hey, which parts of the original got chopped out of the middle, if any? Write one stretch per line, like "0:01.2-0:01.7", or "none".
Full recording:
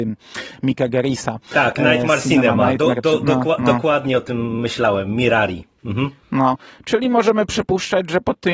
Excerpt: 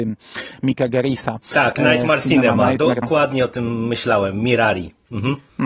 0:03.0-0:03.7